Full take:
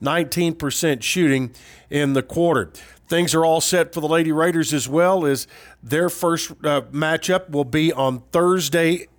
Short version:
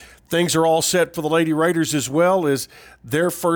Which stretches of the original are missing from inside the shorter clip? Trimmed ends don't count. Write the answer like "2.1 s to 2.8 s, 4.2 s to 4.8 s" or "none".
none